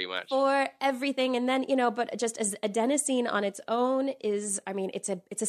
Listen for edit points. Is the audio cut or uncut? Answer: uncut